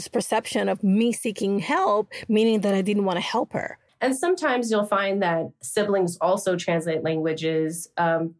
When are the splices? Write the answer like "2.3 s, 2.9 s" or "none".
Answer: 3.9 s